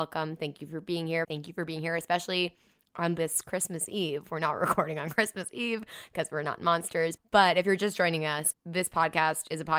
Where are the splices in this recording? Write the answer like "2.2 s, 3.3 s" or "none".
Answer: 1.2 s, 7.2 s, 8.5 s

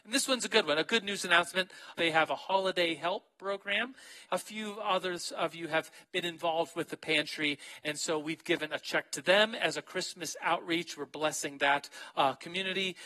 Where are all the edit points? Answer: 1.9 s, 4.3 s

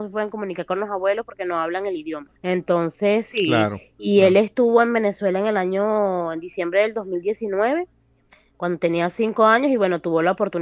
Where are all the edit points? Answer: 2.4 s

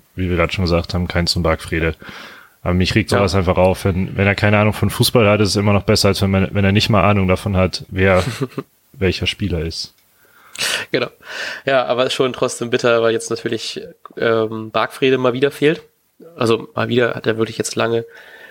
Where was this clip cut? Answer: 7.9 s

